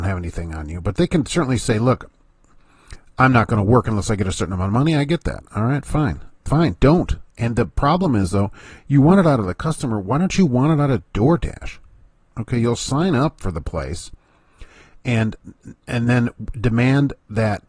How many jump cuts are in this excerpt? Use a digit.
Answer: 0